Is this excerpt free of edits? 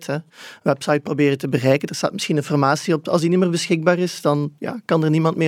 yes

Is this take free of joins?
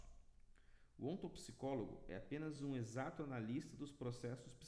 yes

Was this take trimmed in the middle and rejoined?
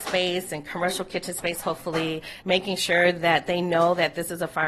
yes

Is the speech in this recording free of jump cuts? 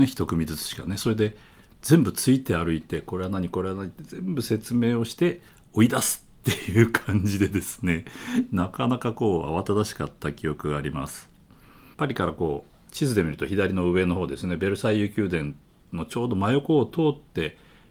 no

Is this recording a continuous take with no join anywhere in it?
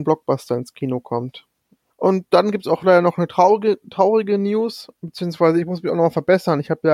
no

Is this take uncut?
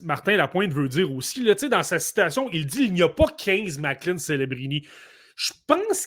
yes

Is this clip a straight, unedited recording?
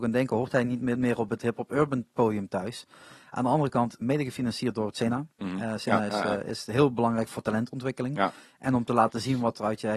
no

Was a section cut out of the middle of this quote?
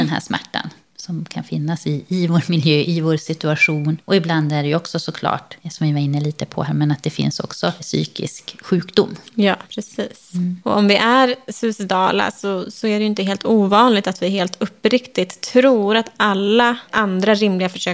no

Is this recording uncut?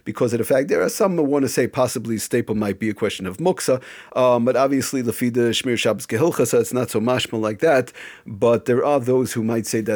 no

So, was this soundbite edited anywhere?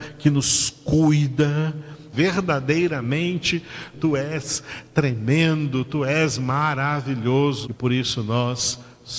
yes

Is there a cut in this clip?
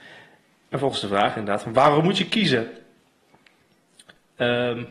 no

